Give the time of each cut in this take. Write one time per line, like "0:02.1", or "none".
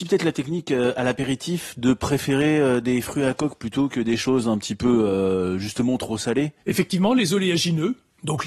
0:06.6